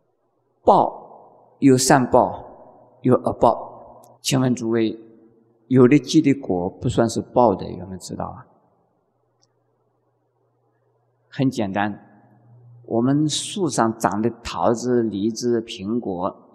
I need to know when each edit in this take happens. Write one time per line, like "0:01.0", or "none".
0:04.1